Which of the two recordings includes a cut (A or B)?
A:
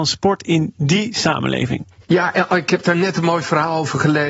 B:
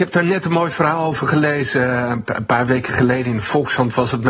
A